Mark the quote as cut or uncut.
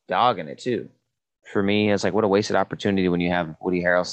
cut